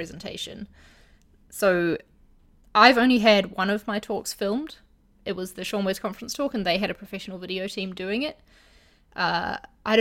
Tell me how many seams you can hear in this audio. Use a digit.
0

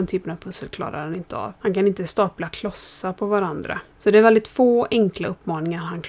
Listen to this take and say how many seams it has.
1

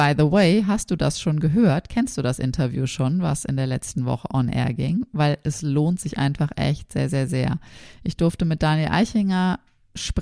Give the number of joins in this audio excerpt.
0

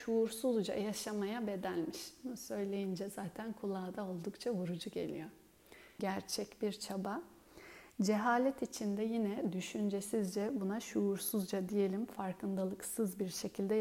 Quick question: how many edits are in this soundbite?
1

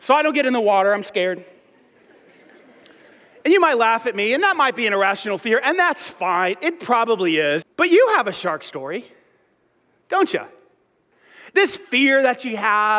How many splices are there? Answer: 1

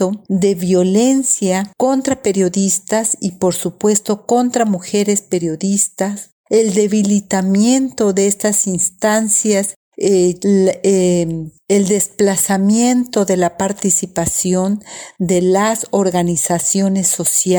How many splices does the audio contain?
1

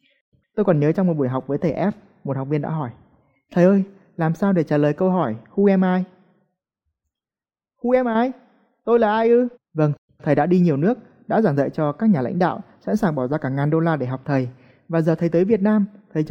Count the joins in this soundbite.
1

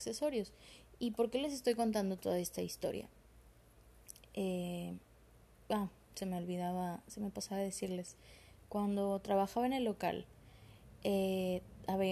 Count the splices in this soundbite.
1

